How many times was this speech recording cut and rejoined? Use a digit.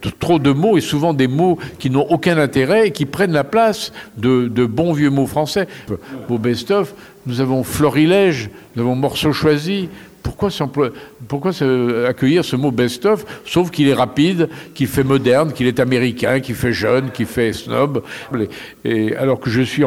2